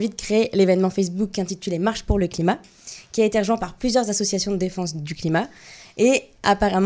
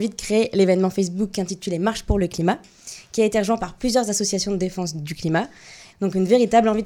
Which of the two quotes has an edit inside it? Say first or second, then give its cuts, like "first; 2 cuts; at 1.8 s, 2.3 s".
second; 1 cut; at 5.9 s